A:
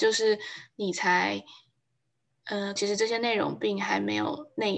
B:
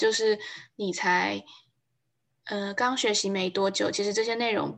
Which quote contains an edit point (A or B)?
A